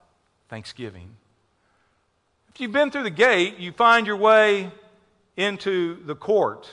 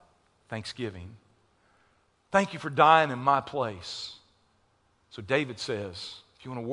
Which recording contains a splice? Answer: second; 2 cuts; at 2.2 s, 4.9 s

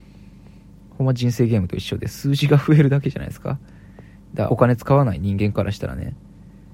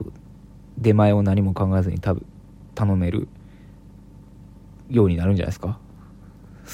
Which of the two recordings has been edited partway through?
first; 1 cut; at 4.5 s

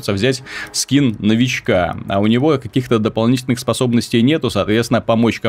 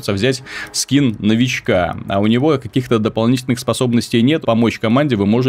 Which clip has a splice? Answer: second; 1 cut; at 4.4 s

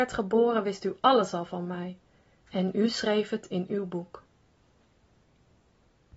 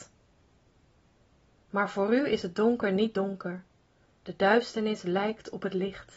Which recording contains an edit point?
second; 1 cut; at 4.0 s

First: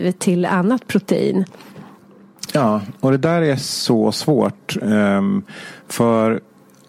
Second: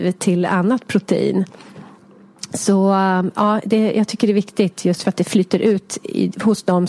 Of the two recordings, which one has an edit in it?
first; 1 cut; at 2.5 s

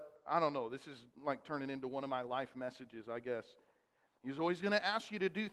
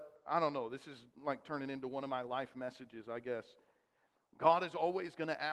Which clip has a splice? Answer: first; 1 cut; at 4.2 s

